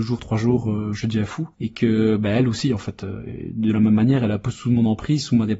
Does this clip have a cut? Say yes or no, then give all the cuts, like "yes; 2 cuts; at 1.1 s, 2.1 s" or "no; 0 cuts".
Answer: yes; 1 cut; at 1.5 s